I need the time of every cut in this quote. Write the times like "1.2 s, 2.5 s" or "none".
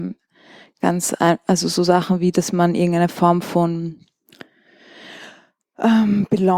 none